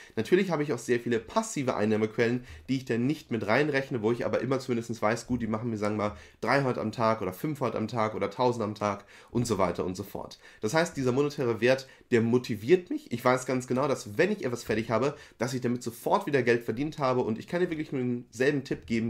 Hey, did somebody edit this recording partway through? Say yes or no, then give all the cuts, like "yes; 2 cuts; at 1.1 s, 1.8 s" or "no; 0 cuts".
no; 0 cuts